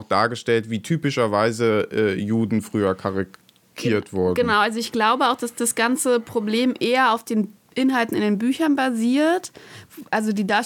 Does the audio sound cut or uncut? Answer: uncut